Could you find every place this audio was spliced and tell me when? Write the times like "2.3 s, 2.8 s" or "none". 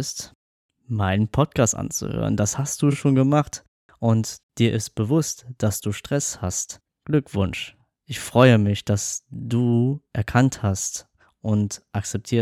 none